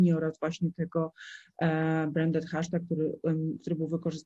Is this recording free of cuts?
yes; 0 cuts

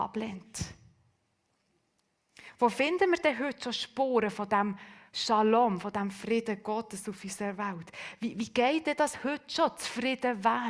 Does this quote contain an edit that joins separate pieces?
no; 0 cuts

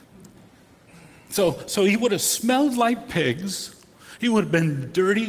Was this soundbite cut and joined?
no; 0 cuts

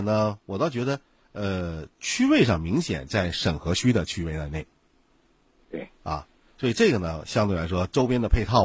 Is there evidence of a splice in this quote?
no; 0 cuts

